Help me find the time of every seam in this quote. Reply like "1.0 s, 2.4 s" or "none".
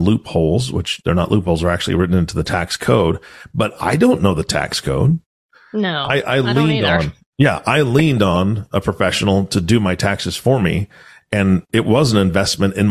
none